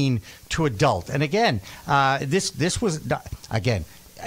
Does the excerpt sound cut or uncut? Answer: uncut